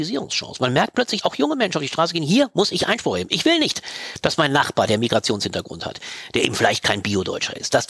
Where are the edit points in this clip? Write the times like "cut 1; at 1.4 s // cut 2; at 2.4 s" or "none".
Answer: cut 1; at 1.2 s

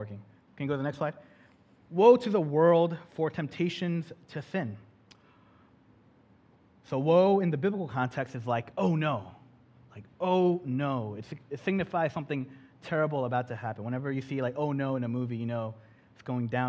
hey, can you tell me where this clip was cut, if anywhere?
none

